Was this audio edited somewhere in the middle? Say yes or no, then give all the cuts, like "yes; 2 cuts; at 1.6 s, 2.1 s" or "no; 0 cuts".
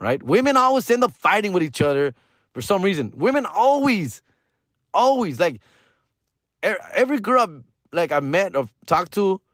no; 0 cuts